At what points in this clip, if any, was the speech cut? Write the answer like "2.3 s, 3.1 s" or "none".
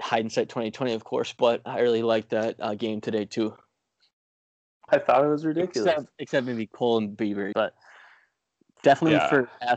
4.9 s, 7.5 s